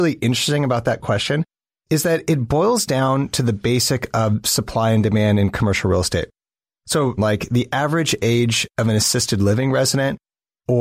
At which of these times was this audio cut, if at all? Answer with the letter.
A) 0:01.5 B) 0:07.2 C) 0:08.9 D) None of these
B